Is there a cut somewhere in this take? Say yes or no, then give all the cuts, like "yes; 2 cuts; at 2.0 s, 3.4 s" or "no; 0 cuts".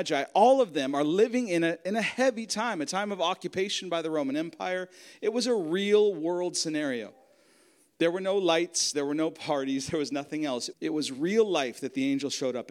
yes; 2 cuts; at 8.9 s, 10.7 s